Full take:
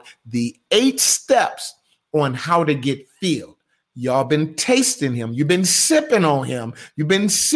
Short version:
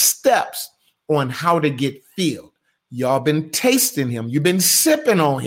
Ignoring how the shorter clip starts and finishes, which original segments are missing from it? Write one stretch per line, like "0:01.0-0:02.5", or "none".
none